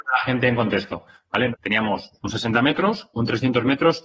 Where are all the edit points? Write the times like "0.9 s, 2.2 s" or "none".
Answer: 1.5 s

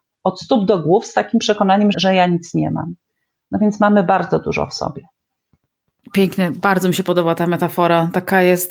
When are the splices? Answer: 1.9 s, 6.0 s

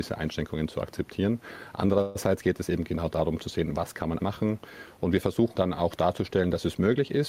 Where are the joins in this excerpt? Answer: 4.2 s, 5.6 s

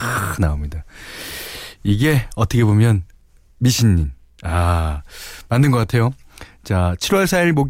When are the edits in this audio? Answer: none

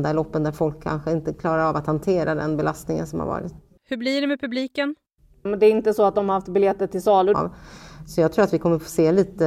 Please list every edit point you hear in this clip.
3.8 s, 5.5 s, 7.3 s

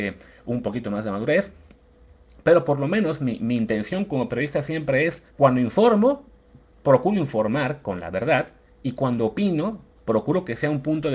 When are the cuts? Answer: 5.3 s

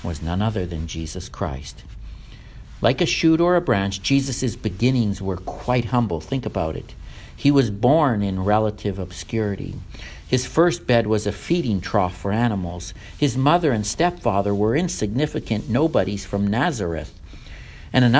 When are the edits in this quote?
none

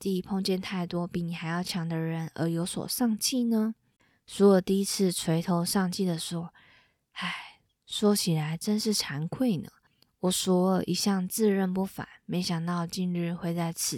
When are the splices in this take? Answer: none

